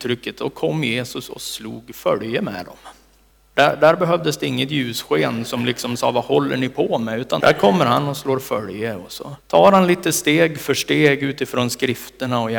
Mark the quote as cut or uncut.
cut